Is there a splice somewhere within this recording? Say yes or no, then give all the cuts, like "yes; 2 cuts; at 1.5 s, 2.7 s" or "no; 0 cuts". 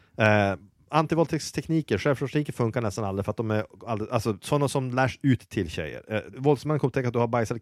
yes; 2 cuts; at 4.4 s, 6.3 s